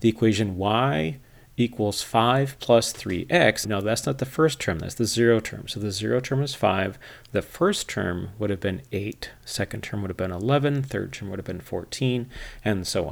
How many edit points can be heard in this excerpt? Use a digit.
1